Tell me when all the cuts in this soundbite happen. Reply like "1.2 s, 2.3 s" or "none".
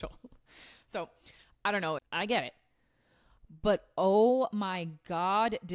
2.0 s